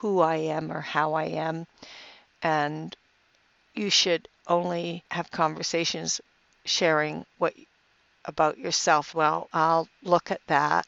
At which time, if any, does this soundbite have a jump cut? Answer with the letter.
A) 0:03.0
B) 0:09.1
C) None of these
B